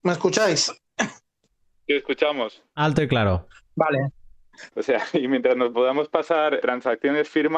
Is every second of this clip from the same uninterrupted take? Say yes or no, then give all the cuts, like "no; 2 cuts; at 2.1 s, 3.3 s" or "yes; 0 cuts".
no; 2 cuts; at 4.7 s, 6.6 s